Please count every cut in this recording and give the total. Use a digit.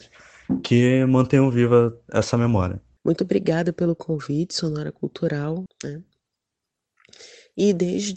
2